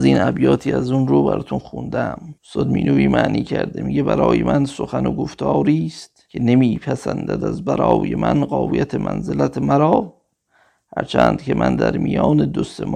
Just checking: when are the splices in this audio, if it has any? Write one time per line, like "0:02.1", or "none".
0:02.4
0:06.3